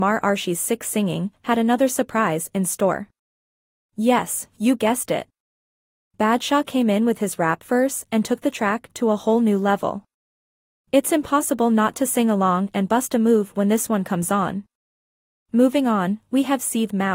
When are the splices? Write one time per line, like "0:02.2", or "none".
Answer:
none